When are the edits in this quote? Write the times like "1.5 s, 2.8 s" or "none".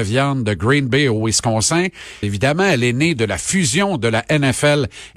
2.2 s